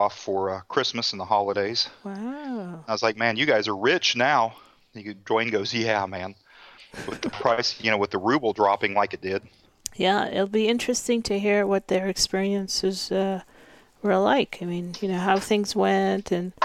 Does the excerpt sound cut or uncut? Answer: uncut